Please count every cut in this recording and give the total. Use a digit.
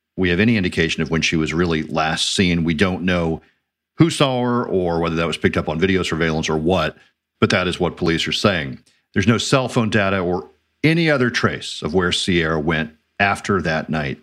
0